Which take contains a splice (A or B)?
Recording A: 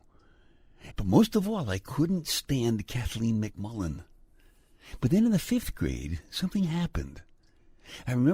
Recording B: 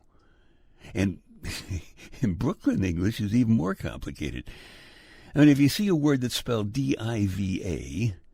A